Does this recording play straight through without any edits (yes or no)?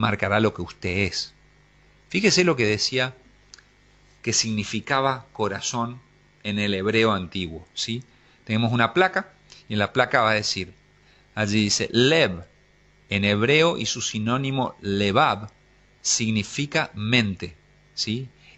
yes